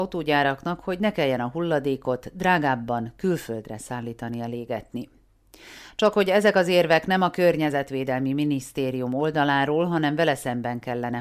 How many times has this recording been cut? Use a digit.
0